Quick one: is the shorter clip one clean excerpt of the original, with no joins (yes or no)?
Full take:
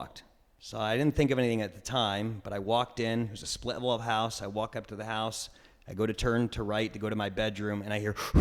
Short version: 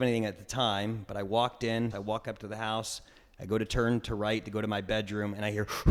no